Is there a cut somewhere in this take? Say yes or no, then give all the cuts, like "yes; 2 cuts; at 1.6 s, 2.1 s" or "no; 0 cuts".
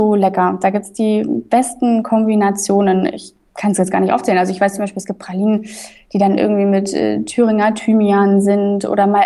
no; 0 cuts